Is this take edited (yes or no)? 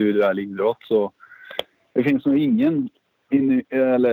no